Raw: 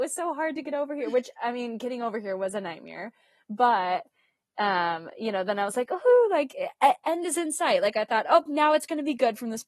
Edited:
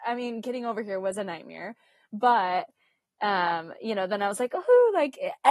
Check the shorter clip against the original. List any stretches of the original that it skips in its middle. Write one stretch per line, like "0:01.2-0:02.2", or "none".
none